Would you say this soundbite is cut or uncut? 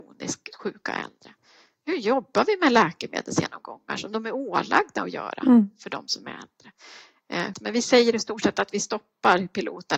cut